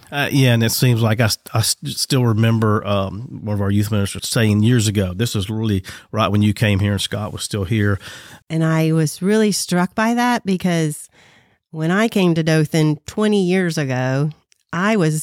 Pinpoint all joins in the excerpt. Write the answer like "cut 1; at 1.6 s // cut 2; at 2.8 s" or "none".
cut 1; at 4.2 s // cut 2; at 8.4 s